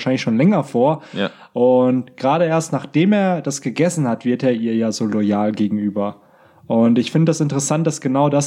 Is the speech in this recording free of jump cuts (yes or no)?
yes